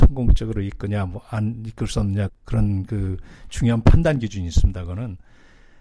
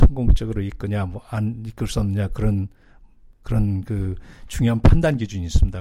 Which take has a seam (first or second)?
first